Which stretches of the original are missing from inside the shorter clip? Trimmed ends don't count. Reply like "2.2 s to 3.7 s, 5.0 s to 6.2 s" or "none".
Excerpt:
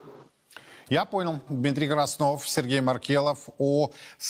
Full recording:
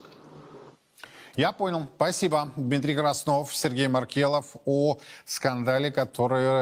1.9 s to 2.5 s